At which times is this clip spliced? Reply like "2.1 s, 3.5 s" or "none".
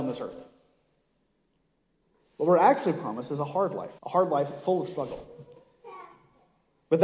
4.0 s